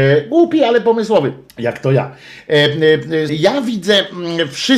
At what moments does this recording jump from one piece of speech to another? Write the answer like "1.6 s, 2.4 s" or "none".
1.5 s, 3.3 s